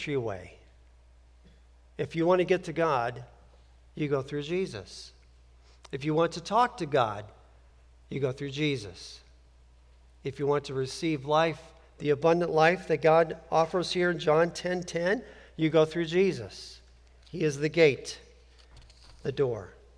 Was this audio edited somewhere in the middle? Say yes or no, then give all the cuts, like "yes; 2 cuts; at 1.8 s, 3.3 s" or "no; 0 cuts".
no; 0 cuts